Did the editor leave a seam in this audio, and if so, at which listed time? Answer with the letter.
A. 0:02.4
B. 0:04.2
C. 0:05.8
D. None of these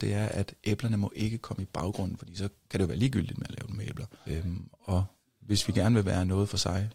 B